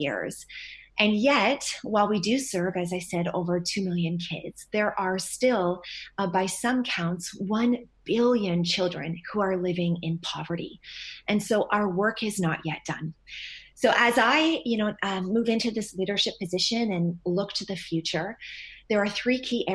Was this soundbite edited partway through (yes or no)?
no